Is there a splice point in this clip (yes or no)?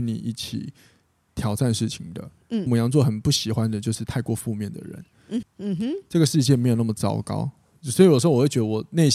yes